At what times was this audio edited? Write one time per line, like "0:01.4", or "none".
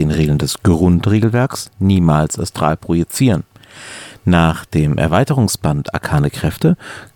none

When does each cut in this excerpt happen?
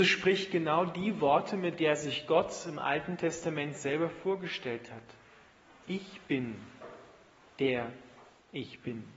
none

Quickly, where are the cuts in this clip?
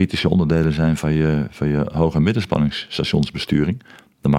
none

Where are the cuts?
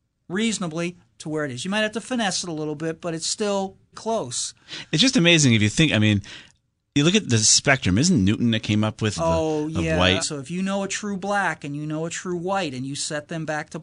0:03.9
0:09.2
0:10.2

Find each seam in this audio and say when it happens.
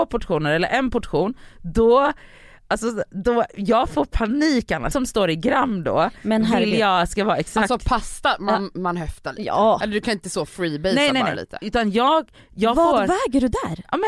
0:04.9
0:09.8

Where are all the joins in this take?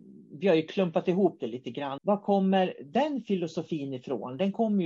0:02.0

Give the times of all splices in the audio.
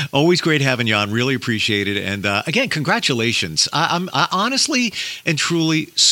none

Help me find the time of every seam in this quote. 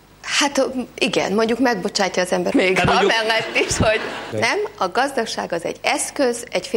0:02.5
0:04.3

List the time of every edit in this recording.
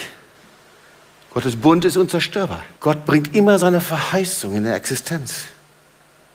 0:02.8

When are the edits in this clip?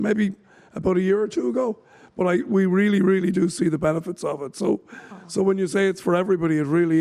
none

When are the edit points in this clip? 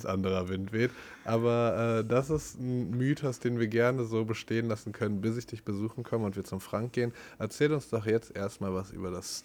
none

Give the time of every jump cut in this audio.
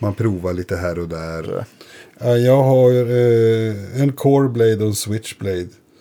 0:01.4

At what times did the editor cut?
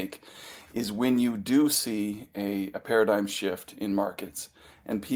none

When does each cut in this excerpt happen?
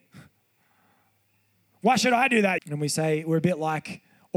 0:02.6

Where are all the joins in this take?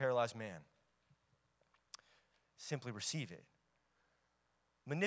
0:02.4

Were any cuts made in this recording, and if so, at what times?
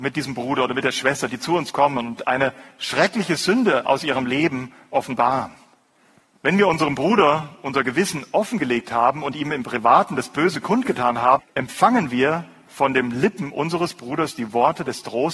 0:06.3
0:11.4

